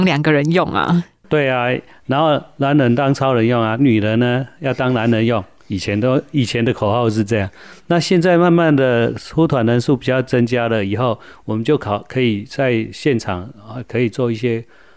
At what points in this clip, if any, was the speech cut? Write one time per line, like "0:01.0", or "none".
none